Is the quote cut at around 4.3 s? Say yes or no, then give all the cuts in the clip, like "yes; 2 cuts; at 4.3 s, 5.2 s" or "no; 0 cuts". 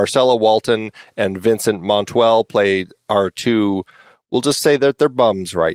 no; 0 cuts